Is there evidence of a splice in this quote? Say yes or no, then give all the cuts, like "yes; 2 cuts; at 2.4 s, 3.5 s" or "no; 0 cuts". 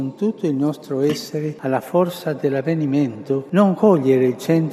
no; 0 cuts